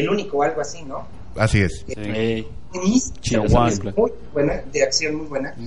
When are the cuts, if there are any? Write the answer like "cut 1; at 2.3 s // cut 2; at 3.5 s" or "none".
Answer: none

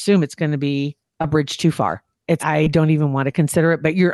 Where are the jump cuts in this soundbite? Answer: cut 1; at 1.1 s // cut 2; at 2.4 s

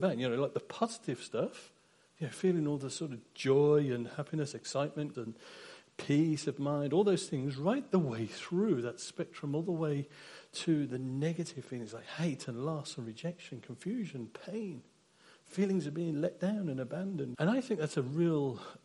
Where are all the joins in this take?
cut 1; at 5.1 s // cut 2; at 17.3 s

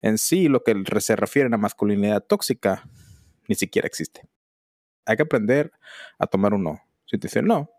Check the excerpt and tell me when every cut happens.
cut 1; at 4.9 s

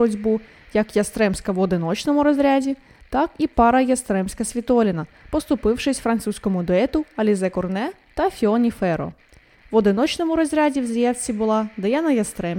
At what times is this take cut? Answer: cut 1; at 9.5 s

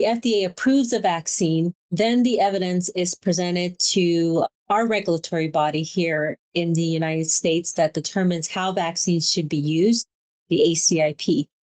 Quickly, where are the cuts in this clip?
cut 1; at 10.4 s

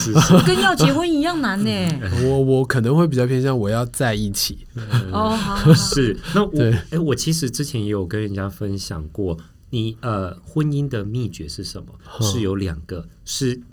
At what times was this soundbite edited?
none

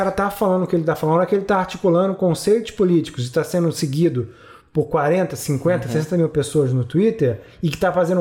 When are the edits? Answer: none

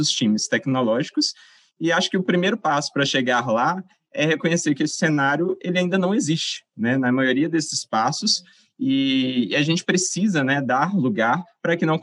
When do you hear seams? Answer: none

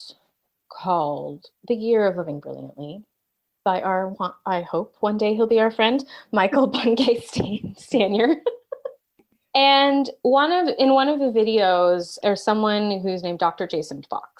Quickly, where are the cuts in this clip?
cut 1; at 12.2 s

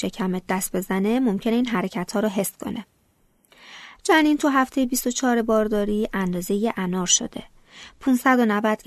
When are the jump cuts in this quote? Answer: none

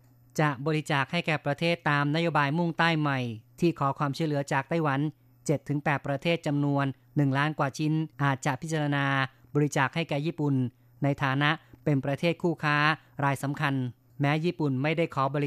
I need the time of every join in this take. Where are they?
cut 1; at 8.1 s

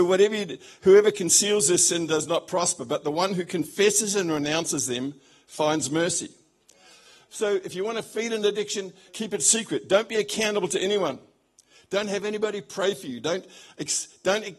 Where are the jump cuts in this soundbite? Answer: cut 1; at 9.1 s

